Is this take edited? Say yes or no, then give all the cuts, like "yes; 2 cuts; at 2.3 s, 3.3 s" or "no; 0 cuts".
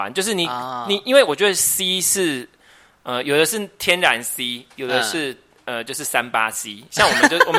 no; 0 cuts